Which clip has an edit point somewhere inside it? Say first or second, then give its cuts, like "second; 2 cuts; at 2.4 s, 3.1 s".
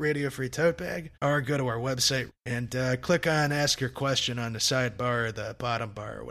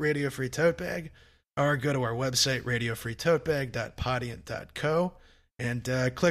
first; 2 cuts; at 1.1 s, 2.3 s